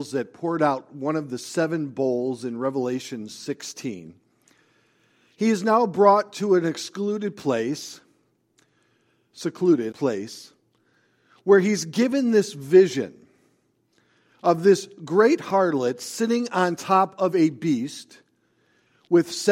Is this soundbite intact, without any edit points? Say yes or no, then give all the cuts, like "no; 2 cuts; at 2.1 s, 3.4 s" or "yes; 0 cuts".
no; 1 cut; at 9.9 s